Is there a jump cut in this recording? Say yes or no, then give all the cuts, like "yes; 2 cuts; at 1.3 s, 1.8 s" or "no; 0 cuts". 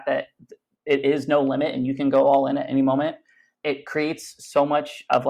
yes; 1 cut; at 3.5 s